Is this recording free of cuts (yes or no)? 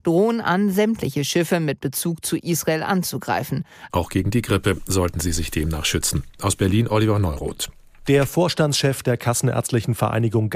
no